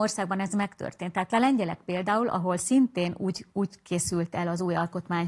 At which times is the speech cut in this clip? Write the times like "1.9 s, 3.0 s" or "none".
none